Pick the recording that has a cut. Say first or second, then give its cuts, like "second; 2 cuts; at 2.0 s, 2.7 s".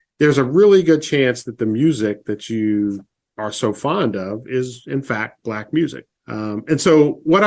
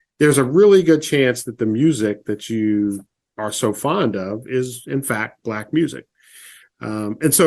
first; 1 cut; at 6.1 s